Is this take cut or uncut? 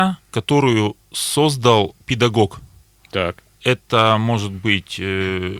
uncut